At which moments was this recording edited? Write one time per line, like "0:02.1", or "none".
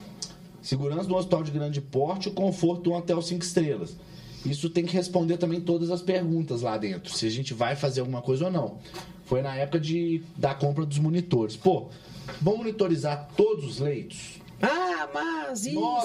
none